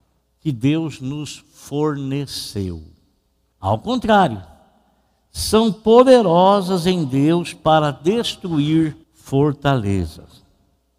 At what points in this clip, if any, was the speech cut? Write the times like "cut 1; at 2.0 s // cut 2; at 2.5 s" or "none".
cut 1; at 3.5 s // cut 2; at 9.0 s